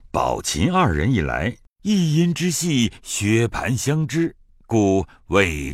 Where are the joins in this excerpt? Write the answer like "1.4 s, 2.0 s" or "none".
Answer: 1.7 s